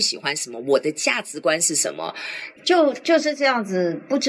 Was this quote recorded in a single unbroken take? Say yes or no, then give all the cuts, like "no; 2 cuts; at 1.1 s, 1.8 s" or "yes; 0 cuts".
no; 1 cut; at 2.6 s